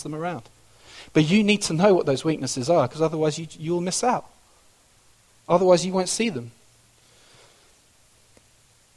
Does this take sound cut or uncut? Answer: uncut